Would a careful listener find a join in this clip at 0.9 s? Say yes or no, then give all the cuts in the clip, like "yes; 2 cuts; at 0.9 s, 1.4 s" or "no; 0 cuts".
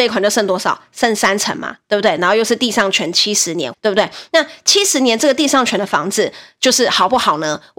no; 1 cut; at 3.7 s